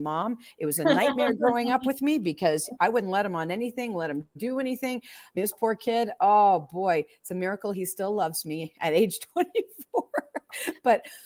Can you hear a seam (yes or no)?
no